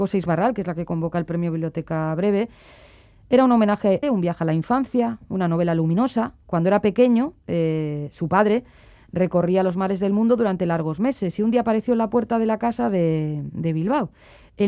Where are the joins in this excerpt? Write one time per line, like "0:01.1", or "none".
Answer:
0:04.0